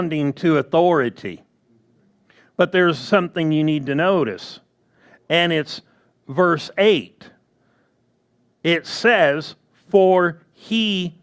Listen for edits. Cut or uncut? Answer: uncut